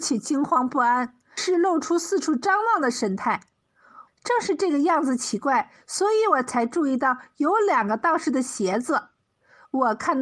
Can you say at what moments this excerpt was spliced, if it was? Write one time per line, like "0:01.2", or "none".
0:01.4
0:04.1